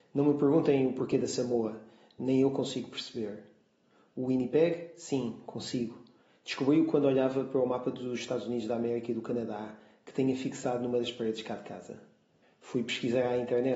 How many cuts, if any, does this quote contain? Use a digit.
1